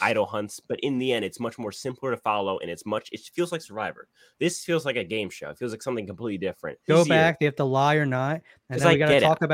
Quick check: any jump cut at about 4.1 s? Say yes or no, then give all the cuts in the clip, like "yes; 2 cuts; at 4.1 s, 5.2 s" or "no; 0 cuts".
no; 2 cuts; at 6.9 s, 8.6 s